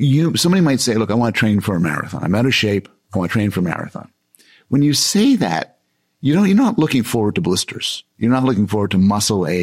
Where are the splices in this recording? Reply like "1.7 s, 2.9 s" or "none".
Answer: none

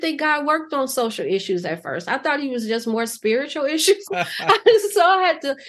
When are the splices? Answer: 4.1 s

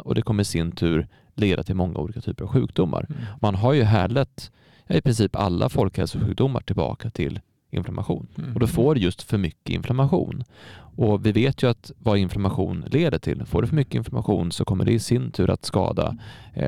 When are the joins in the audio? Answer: 8.3 s

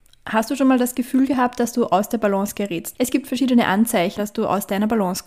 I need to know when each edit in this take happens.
2.9 s, 4.2 s

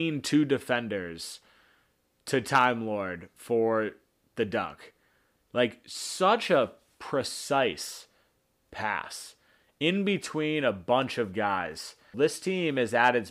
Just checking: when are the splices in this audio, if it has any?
12.1 s

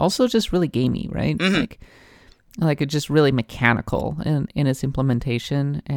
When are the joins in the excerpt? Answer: none

